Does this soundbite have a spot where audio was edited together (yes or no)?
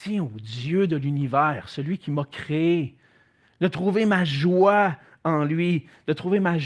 no